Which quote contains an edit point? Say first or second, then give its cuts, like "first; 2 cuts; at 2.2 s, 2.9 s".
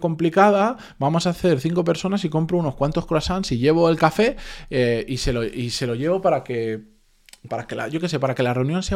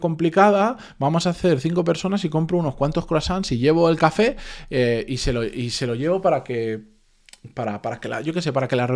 first; 1 cut; at 7.5 s